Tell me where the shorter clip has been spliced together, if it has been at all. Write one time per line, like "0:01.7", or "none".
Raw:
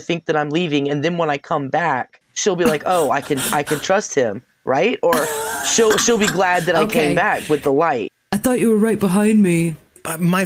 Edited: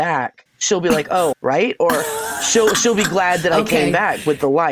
0:01.3